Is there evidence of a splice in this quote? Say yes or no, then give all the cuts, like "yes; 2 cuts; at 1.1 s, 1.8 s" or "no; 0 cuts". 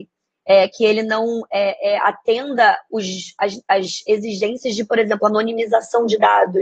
no; 0 cuts